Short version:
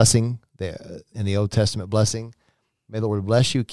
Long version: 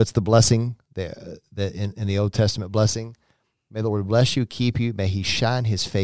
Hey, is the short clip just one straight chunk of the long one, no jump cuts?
no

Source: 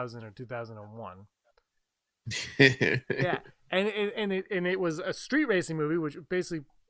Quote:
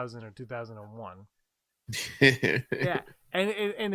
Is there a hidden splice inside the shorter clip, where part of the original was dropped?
yes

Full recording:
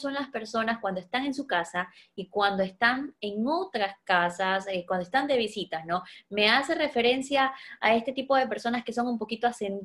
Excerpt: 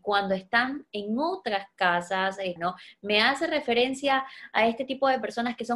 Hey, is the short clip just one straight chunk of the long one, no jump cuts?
no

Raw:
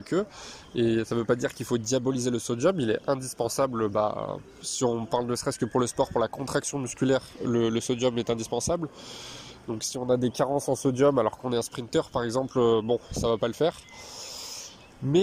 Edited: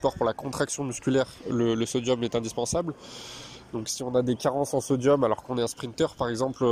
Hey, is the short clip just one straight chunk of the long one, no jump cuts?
yes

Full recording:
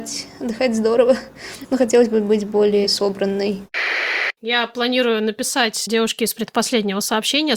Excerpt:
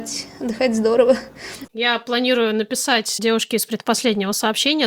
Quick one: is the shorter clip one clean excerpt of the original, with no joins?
no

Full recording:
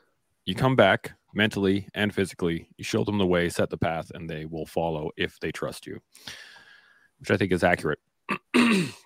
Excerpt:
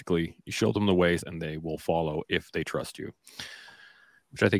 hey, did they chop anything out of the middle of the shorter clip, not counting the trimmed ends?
yes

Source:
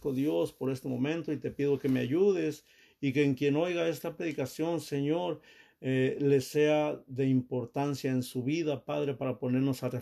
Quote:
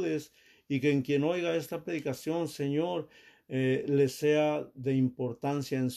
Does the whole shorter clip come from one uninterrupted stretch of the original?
yes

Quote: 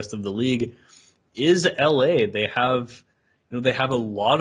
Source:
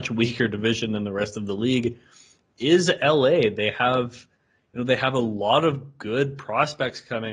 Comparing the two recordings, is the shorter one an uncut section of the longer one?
yes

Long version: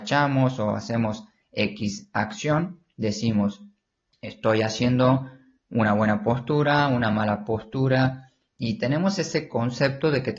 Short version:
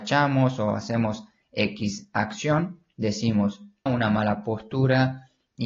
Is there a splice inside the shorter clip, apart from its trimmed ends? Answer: yes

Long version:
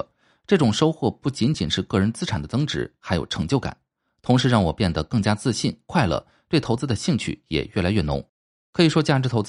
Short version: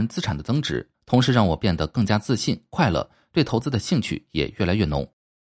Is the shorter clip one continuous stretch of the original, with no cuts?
no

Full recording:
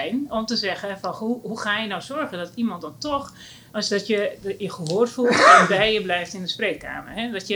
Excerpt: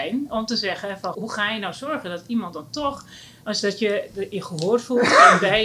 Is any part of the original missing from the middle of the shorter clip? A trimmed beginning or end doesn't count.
yes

